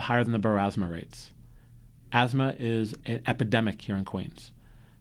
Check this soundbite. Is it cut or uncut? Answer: uncut